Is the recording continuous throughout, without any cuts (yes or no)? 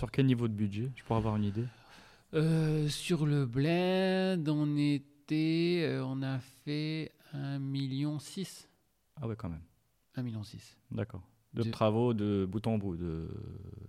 no